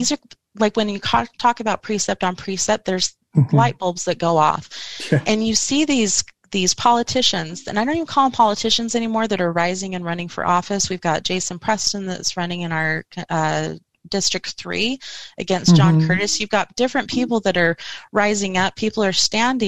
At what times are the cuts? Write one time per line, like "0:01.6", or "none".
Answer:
0:14.0